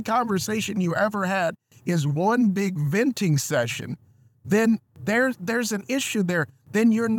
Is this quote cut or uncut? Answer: uncut